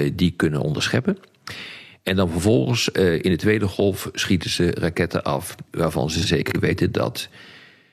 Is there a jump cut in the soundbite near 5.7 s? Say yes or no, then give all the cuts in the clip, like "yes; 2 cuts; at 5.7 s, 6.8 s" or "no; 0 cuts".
yes; 1 cut; at 5.7 s